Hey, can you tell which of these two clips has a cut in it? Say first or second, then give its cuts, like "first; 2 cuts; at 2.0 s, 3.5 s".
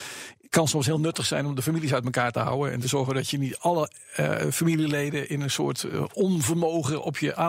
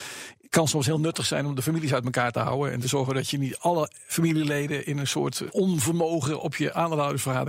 second; 2 cuts; at 4.1 s, 5.5 s